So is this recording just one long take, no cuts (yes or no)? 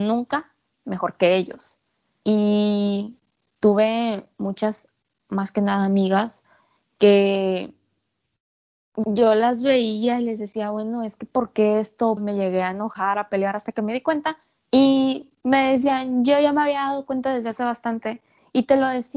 no